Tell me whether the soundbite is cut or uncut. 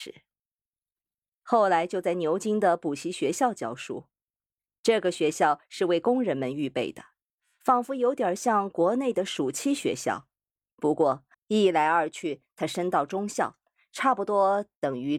cut